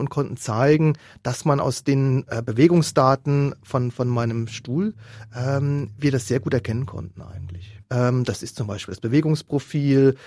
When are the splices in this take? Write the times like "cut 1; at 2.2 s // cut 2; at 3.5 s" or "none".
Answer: cut 1; at 7.8 s